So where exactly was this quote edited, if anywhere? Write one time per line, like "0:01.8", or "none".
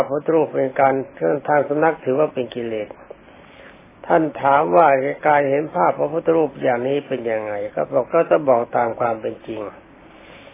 0:08.0